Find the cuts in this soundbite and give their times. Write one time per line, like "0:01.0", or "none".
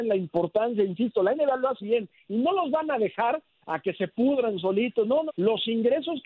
0:01.8
0:05.3